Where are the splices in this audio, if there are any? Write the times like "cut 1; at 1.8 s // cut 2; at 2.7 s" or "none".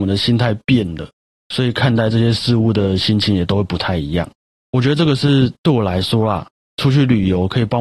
none